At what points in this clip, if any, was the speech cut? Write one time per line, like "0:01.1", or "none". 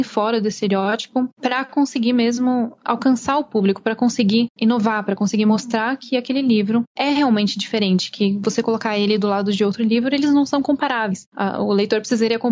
none